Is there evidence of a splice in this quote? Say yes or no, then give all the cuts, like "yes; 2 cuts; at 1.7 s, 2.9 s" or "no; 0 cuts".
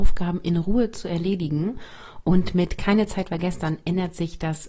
no; 0 cuts